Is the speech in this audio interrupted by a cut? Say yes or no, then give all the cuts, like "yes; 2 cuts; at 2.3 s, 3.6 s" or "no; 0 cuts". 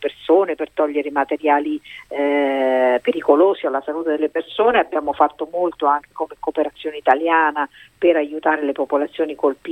no; 0 cuts